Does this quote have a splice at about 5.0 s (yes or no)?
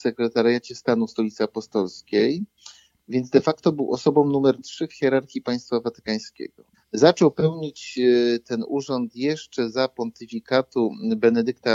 no